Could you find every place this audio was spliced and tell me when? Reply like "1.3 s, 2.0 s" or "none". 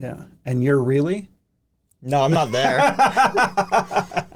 none